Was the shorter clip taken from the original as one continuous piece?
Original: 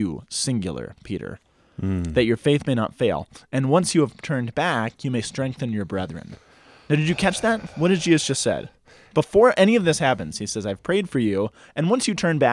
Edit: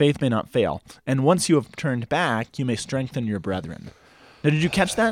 yes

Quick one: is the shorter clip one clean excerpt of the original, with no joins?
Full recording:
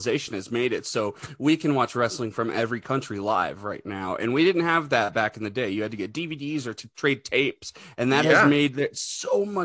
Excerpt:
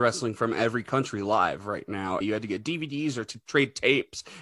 no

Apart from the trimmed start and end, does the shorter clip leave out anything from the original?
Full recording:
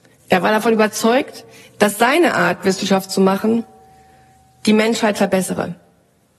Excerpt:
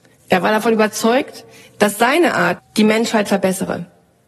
yes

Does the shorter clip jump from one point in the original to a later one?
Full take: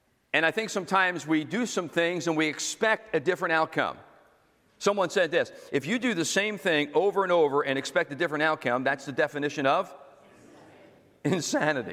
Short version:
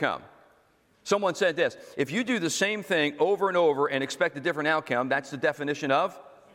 no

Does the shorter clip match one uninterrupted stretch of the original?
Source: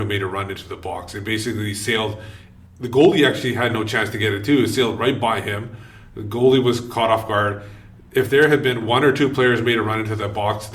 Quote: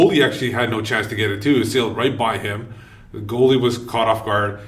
yes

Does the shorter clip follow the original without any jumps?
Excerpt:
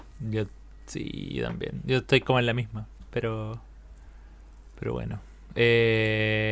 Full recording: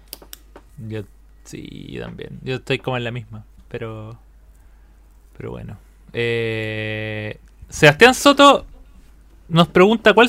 yes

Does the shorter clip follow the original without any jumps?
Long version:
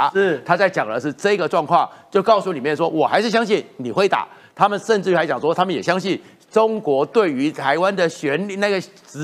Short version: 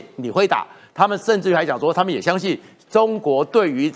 yes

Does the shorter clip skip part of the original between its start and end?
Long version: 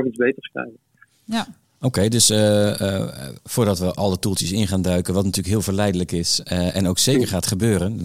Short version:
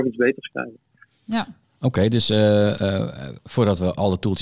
no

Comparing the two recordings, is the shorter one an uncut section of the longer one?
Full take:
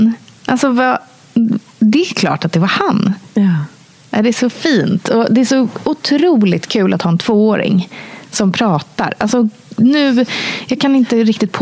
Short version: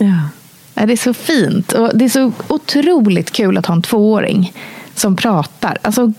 yes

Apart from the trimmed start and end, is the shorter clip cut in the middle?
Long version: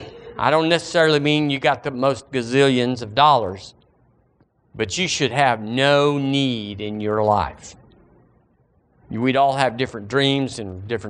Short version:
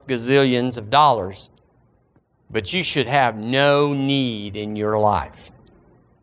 no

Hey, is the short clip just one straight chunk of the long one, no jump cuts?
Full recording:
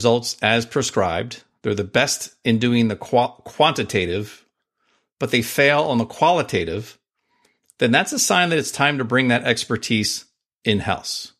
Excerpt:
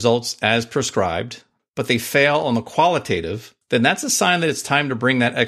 no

